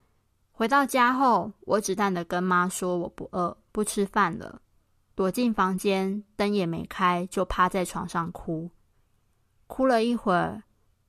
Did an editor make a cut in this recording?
yes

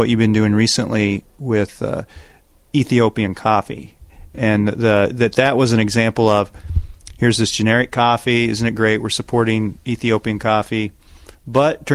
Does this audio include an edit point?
no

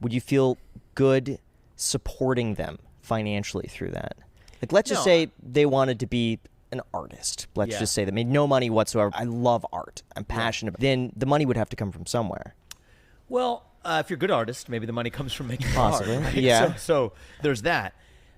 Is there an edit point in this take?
yes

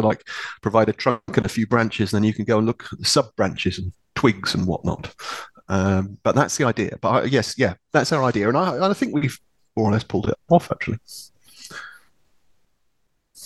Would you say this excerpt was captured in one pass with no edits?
yes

